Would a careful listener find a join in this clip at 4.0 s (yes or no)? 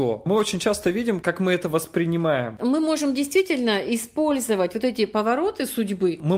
no